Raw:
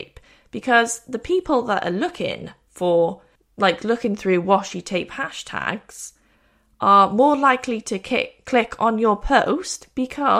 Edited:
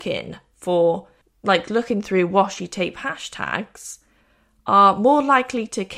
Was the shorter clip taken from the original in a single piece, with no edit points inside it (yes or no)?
yes